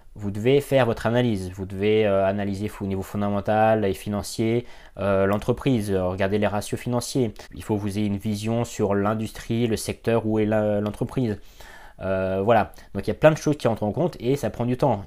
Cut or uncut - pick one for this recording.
uncut